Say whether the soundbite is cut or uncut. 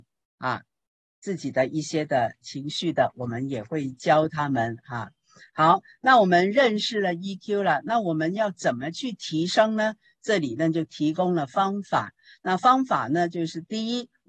uncut